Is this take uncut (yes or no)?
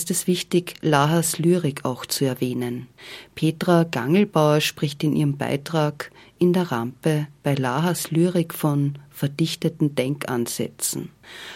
yes